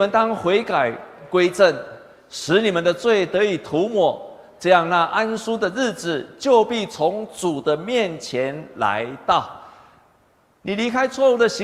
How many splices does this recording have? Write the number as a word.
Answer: zero